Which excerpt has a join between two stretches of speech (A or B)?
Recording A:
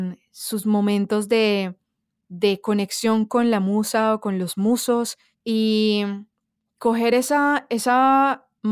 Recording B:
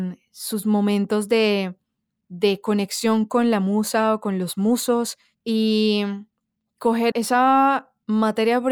B